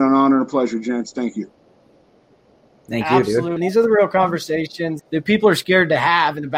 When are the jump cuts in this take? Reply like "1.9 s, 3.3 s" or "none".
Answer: 3.6 s, 5.0 s